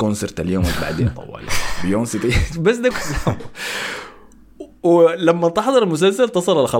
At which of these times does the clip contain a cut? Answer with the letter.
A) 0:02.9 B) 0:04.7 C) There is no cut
A